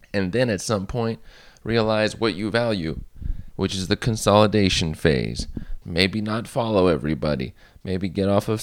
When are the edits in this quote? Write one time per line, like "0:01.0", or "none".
0:03.5
0:05.8